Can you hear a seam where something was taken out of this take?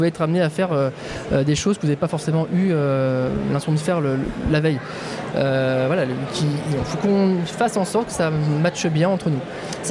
yes; 1 cut; at 5.3 s

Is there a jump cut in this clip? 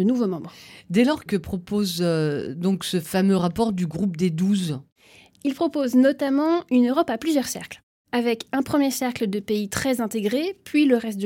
yes; 1 cut; at 1.3 s

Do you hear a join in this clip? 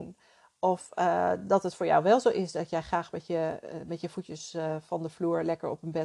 no; 0 cuts

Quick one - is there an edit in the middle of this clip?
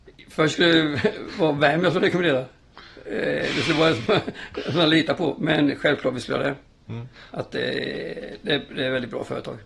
no; 0 cuts

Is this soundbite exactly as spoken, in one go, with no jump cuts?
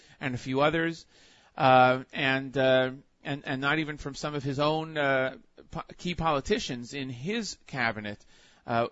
yes; 0 cuts

